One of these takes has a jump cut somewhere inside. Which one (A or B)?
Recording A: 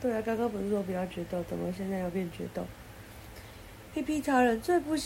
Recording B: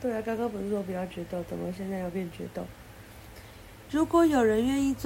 B